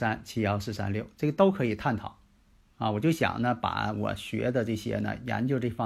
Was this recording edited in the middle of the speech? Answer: no; 0 cuts

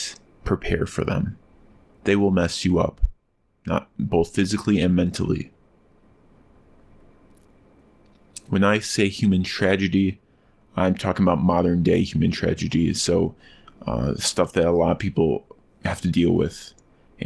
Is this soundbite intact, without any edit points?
yes; 0 cuts

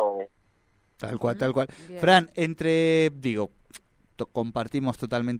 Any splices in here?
yes; 1 cut; at 0.9 s

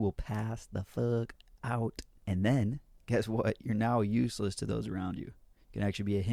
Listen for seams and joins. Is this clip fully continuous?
yes; 0 cuts

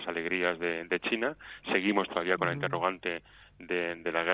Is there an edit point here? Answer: no; 0 cuts

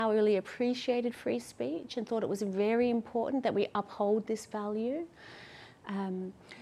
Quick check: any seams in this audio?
no; 0 cuts

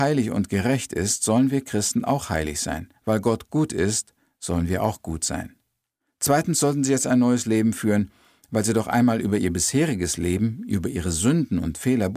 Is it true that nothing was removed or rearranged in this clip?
yes; 0 cuts

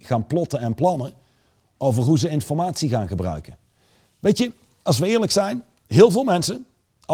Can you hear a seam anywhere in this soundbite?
no; 0 cuts

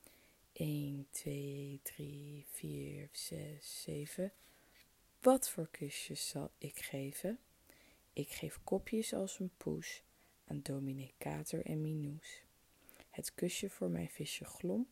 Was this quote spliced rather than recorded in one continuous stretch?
yes; 1 cut; at 3.1 s

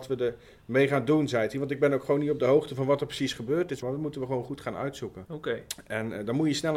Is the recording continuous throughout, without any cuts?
no; 2 cuts; at 3.8 s, 5.3 s

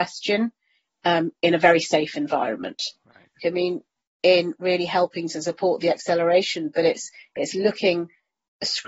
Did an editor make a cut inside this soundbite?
yes; 1 cut; at 3.4 s

